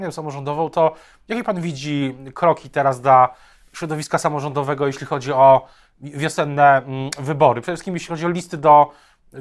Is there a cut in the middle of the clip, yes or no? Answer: no